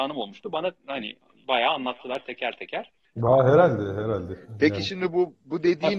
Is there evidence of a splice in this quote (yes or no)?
yes